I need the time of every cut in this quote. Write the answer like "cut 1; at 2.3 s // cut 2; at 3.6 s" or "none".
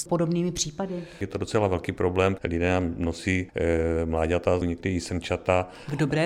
cut 1; at 4.6 s